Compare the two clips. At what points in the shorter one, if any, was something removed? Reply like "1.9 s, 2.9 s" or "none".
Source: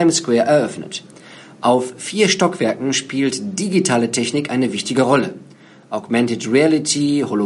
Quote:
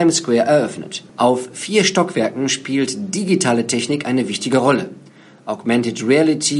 1.1 s